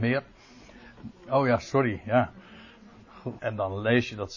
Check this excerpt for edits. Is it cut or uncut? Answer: cut